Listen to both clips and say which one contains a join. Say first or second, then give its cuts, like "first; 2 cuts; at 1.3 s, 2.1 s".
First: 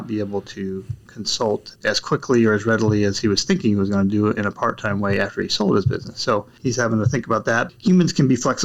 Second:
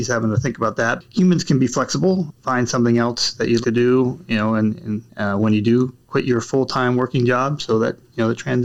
second; 1 cut; at 3.6 s